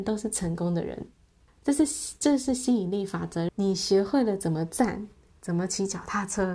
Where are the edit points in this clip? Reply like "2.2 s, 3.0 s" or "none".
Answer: 1.5 s, 3.5 s, 5.3 s